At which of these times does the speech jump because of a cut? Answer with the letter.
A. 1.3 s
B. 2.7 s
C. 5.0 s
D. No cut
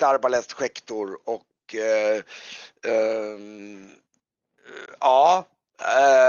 D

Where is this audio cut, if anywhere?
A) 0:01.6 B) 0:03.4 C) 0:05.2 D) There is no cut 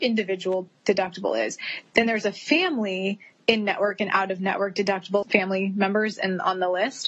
C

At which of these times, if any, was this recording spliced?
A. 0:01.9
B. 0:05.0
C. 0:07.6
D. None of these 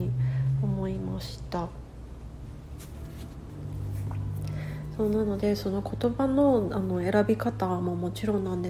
D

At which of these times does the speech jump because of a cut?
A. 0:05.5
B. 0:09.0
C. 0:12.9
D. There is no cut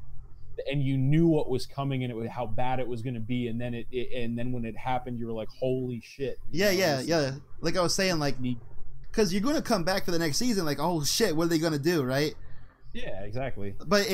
B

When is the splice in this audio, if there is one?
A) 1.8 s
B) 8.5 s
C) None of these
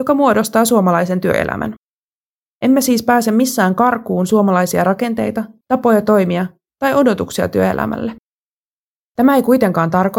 C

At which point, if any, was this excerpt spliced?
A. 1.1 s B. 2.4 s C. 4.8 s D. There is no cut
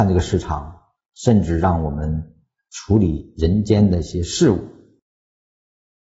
D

